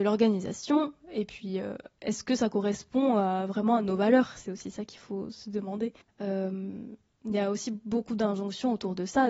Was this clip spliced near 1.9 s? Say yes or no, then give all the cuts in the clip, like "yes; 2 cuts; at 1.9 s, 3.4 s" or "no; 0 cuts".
no; 1 cut; at 6.0 s